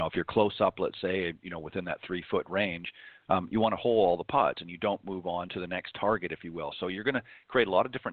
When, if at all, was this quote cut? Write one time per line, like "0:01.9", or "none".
none